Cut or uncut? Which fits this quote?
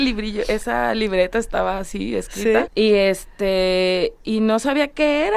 cut